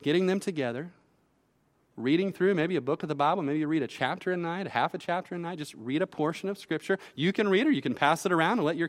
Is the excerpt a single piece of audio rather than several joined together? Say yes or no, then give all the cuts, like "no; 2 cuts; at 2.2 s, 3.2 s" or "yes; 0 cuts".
yes; 0 cuts